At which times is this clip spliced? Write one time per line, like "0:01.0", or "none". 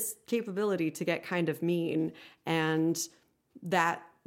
none